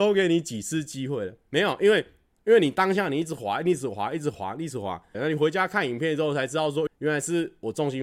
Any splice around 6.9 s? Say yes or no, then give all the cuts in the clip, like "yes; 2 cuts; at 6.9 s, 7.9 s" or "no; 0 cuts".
yes; 2 cuts; at 5.1 s, 6.9 s